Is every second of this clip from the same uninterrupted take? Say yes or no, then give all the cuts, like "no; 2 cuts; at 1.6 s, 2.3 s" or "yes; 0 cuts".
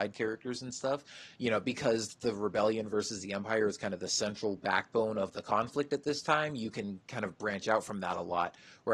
yes; 0 cuts